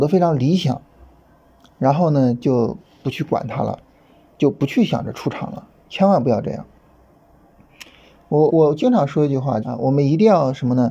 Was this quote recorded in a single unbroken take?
no; 2 cuts; at 8.5 s, 9.6 s

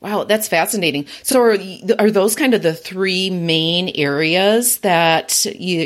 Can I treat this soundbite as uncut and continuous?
yes; 0 cuts

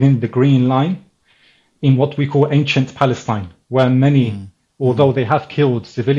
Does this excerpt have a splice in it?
yes; 1 cut; at 4.7 s

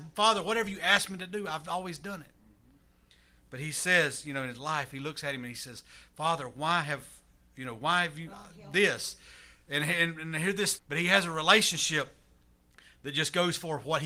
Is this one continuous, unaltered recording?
no; 1 cut; at 10.8 s

